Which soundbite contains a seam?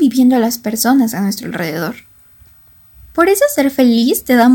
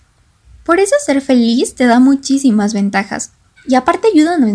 second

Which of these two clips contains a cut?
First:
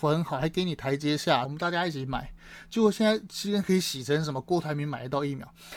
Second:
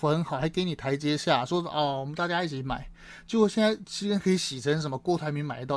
first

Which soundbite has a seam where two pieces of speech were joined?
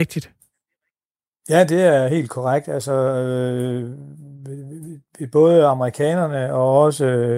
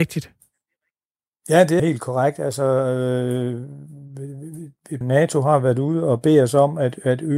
second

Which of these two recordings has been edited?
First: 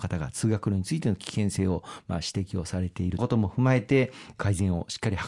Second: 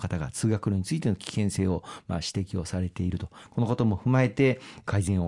first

